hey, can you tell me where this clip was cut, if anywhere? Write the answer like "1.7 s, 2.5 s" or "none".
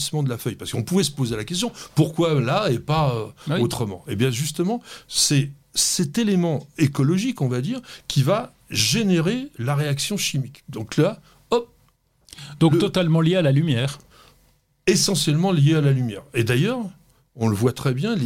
none